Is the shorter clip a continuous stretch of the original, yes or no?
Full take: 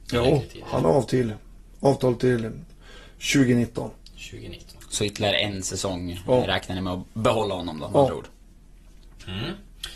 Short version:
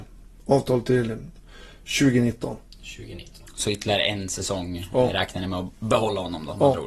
yes